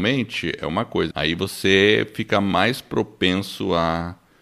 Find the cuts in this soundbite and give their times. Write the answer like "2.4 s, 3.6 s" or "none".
1.1 s